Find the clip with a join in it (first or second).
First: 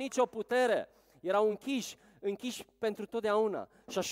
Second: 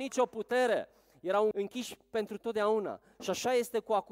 second